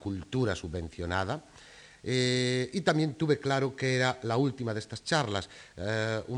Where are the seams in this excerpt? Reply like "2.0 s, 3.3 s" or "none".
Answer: 2.0 s